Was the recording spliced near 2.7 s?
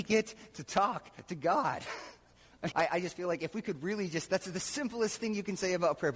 yes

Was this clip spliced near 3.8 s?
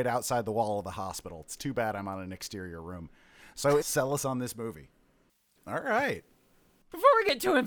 yes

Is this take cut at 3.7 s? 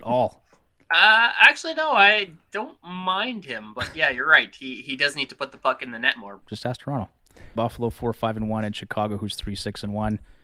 no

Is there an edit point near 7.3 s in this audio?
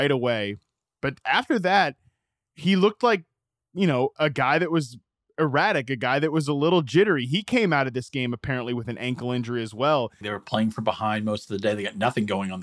no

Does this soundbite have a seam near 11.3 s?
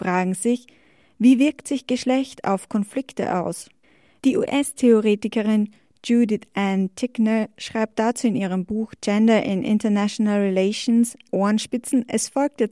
yes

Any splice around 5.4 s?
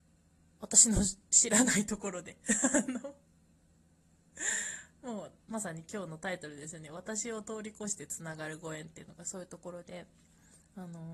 yes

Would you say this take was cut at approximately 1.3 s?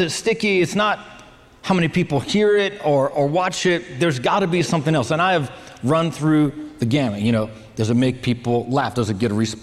no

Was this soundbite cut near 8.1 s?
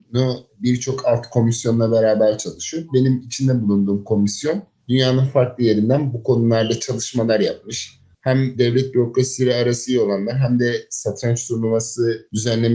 yes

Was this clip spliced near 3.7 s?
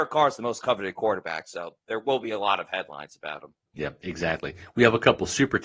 no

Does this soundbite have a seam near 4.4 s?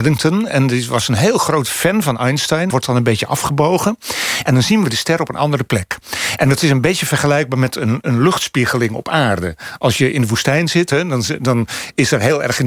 no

